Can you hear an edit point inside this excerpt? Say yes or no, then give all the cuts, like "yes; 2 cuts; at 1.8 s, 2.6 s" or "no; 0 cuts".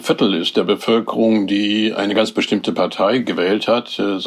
no; 0 cuts